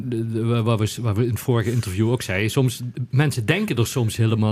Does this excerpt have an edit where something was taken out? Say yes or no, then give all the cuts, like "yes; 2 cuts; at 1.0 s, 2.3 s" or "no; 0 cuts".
no; 0 cuts